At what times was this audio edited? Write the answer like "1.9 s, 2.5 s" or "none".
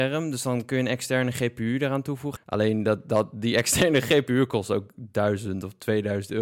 2.4 s